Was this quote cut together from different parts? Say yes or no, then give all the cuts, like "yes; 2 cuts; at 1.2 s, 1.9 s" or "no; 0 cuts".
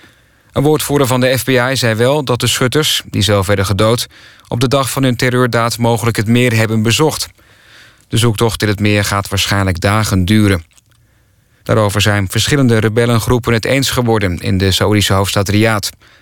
yes; 1 cut; at 11.6 s